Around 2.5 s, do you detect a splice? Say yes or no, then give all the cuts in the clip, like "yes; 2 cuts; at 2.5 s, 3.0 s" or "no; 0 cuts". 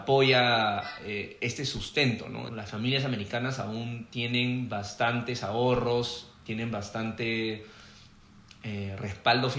yes; 1 cut; at 2.5 s